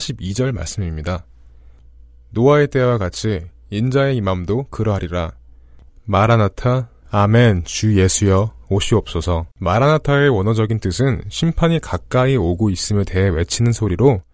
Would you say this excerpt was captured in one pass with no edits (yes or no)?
no